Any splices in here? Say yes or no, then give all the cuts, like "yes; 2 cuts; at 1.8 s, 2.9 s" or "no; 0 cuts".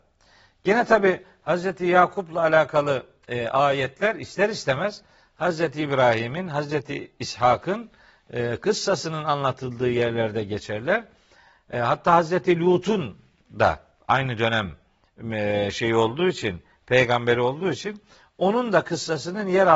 no; 0 cuts